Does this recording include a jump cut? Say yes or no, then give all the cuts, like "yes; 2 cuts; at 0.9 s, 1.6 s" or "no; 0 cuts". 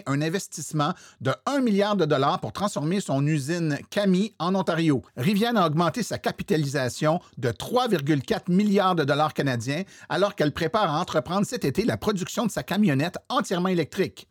yes; 1 cut; at 5.1 s